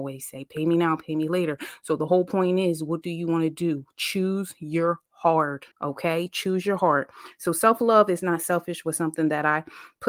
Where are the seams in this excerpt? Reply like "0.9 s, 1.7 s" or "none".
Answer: 5.7 s